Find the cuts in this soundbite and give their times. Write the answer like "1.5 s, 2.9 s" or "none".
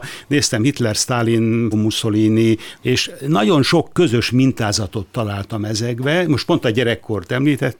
1.7 s, 2.8 s

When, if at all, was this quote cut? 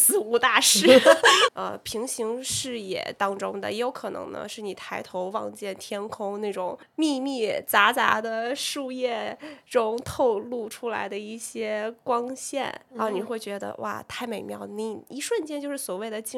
1.5 s

